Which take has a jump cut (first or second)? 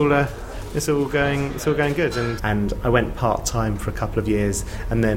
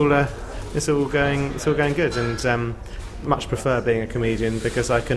first